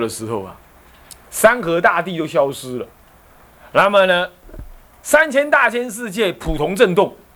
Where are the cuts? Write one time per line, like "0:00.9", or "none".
none